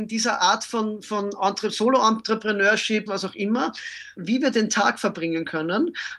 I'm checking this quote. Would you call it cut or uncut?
cut